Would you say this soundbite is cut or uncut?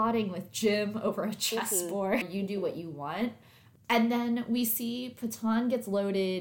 cut